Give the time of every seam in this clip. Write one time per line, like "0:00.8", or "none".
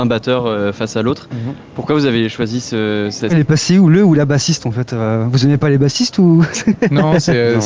0:03.3

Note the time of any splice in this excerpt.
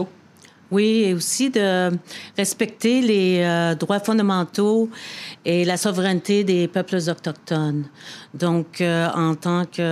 none

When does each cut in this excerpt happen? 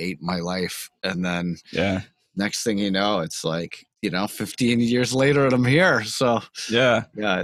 0:03.9

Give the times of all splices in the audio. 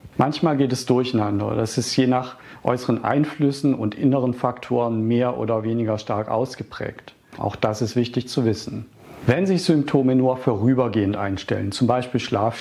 0:07.4

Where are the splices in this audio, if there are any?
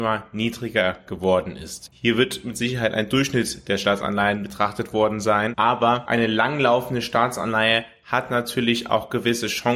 0:01.9

